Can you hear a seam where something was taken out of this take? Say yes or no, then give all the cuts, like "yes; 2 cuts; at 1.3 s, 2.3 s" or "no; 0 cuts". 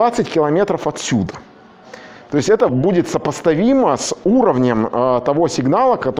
yes; 1 cut; at 2.7 s